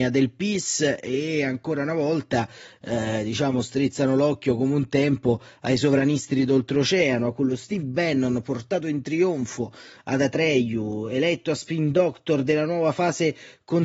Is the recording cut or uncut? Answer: uncut